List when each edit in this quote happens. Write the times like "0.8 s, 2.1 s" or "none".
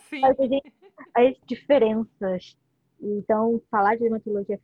1.4 s